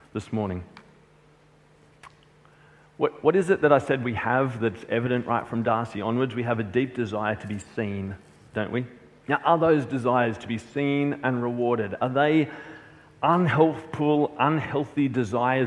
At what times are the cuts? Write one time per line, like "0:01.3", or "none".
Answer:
0:09.2

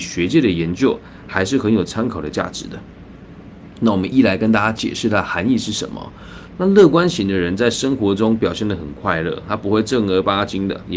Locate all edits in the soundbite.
0:04.1
0:06.5

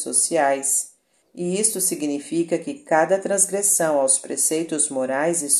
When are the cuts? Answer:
0:01.2

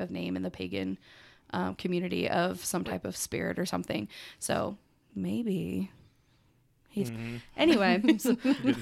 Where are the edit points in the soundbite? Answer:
0:07.1

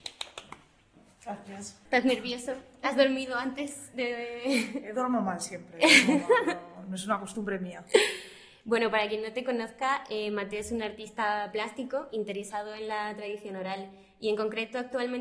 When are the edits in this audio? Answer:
0:01.9

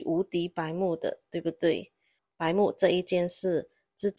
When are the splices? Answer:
none

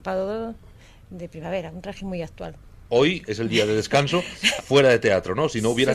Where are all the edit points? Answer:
0:03.2
0:04.6

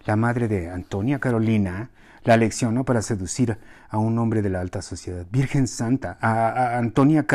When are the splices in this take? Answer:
none

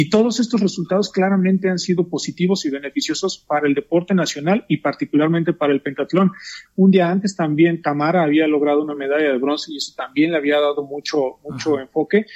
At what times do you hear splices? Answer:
0:06.7

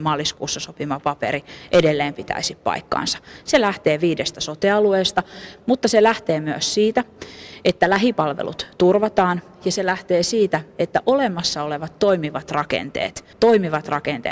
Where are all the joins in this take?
0:13.3

